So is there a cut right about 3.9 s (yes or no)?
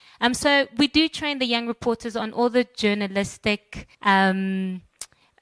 yes